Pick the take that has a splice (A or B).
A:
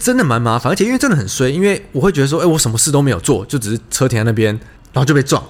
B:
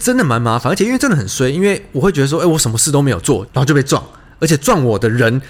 B